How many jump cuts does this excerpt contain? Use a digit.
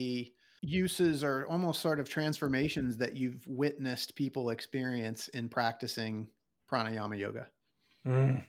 0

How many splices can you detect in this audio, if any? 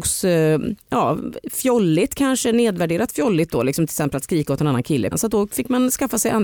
1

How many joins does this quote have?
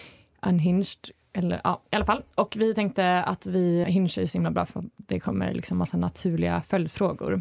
1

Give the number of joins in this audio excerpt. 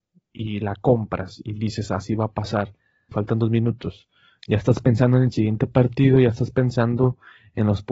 1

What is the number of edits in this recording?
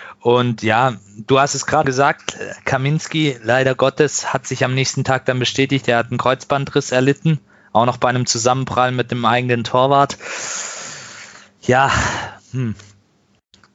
1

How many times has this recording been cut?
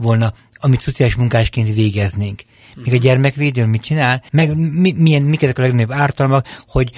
1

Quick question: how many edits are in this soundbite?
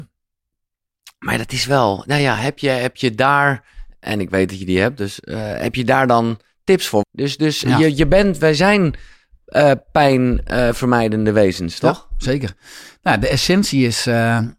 1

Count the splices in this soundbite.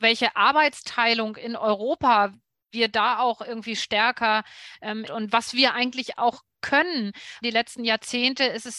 2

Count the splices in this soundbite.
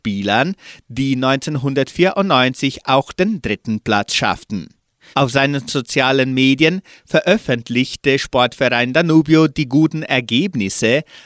1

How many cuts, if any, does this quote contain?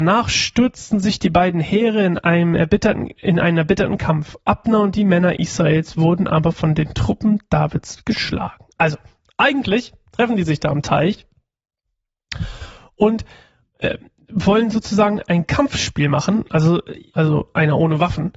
1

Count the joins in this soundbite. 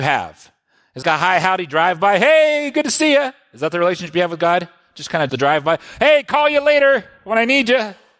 2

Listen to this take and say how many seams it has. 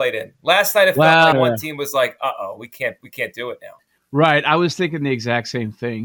1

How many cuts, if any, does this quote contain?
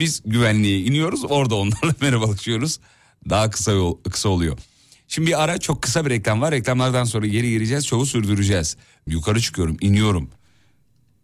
1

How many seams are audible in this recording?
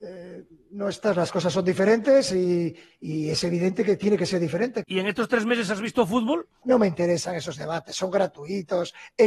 2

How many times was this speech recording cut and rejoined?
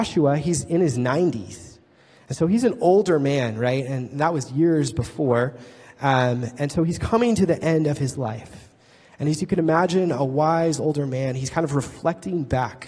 0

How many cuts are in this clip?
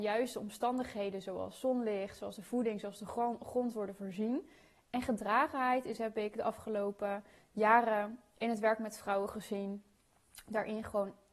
0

